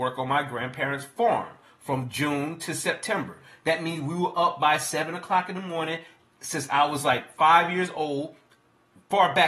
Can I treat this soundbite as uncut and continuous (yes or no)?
yes